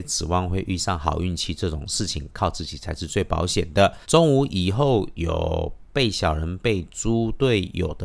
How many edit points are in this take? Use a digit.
2